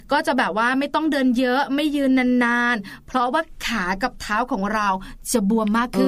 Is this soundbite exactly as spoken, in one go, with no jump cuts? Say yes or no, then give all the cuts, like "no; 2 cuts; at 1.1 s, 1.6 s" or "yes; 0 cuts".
yes; 0 cuts